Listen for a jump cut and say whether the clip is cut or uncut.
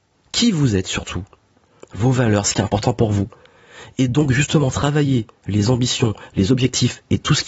uncut